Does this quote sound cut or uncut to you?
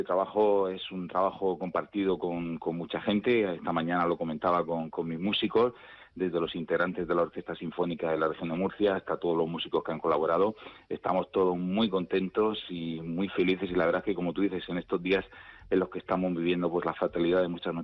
uncut